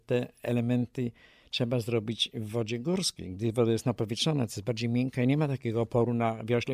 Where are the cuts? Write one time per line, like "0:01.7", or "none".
none